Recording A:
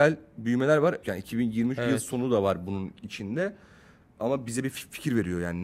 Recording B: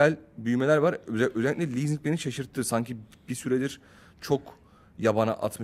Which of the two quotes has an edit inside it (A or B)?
A